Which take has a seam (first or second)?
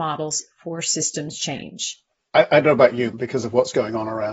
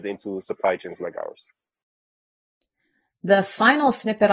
first